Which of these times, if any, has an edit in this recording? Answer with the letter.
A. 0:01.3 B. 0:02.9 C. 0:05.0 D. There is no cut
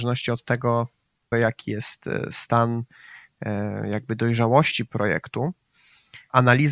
A